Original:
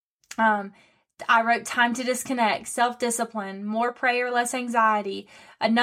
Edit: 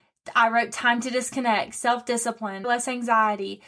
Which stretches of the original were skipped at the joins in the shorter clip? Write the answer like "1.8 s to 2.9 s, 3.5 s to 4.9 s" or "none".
3.6 s to 4.3 s